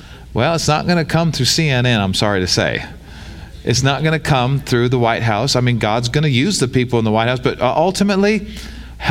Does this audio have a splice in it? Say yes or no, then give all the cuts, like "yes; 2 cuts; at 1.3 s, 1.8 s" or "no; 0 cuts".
no; 0 cuts